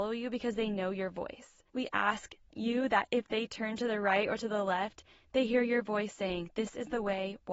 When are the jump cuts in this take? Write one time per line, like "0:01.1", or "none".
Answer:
0:01.7